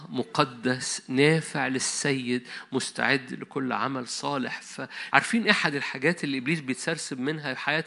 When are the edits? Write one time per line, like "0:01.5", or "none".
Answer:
0:05.1

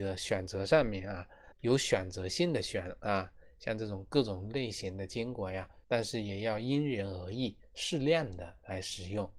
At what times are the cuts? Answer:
0:01.5
0:05.8

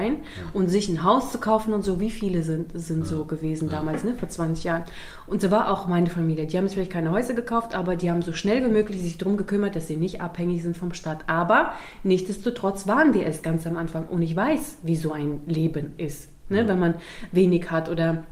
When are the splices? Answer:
none

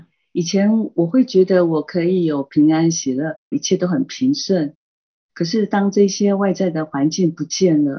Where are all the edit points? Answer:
0:03.5

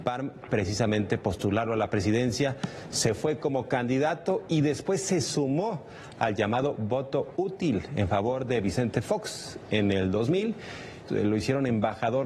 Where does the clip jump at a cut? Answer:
0:11.1

